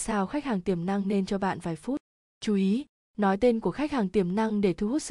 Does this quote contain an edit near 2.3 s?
yes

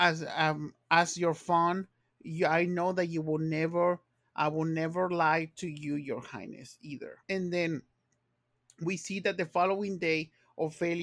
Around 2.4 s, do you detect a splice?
no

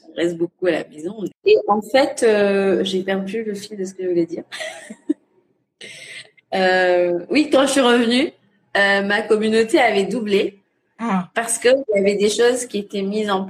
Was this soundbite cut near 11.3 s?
no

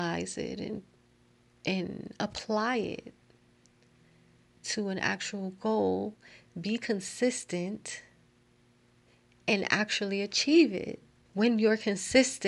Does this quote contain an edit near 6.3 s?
no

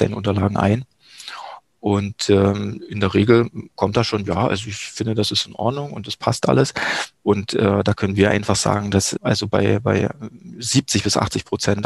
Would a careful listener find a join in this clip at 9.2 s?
yes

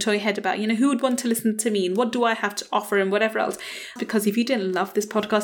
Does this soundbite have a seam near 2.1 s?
no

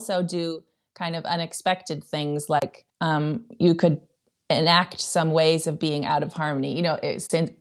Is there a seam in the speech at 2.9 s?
yes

